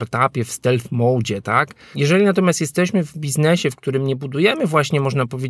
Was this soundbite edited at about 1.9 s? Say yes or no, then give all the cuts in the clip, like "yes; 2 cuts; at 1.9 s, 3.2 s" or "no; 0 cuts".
yes; 1 cut; at 1.9 s